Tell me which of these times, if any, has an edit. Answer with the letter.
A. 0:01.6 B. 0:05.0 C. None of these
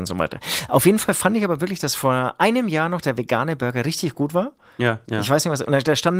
B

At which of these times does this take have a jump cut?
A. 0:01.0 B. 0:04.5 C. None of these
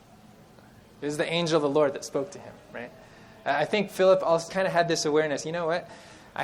B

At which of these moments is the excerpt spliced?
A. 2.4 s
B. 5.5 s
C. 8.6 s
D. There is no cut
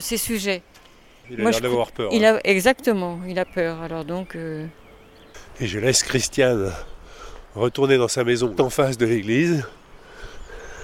C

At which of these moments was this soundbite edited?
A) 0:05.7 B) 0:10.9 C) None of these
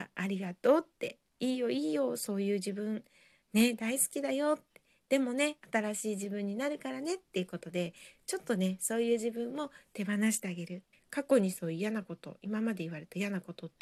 B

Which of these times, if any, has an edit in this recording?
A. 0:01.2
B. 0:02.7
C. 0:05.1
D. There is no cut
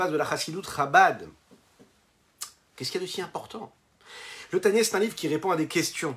D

